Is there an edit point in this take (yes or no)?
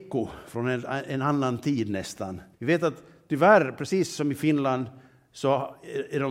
yes